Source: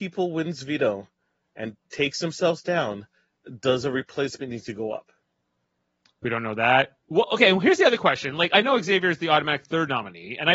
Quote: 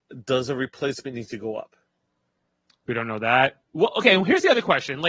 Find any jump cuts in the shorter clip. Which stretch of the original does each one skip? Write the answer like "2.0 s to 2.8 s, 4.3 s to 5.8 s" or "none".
none